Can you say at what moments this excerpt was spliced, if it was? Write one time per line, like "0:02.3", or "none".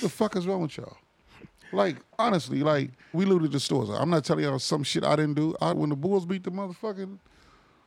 0:03.1
0:05.7